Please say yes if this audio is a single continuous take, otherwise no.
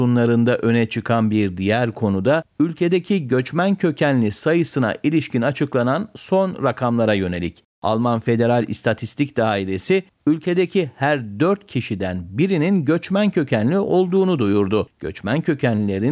yes